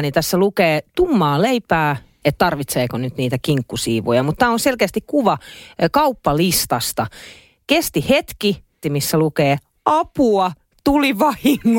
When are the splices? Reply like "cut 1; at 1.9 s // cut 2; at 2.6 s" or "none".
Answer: cut 1; at 2.2 s // cut 2; at 8.8 s